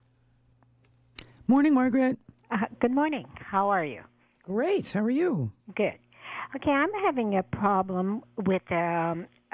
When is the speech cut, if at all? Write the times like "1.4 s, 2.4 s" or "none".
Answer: none